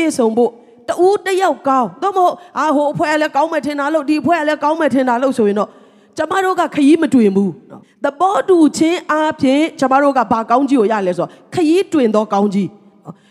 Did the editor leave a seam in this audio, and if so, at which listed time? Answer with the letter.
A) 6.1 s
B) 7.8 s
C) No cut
B